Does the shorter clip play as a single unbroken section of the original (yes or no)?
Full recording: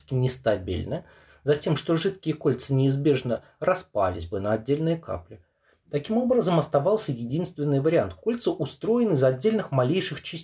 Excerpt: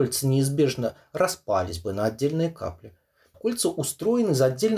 no